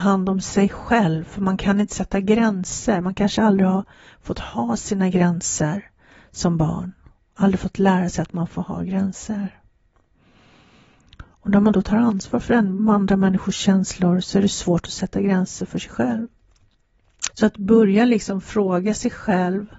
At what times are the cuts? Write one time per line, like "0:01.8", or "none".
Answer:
0:17.3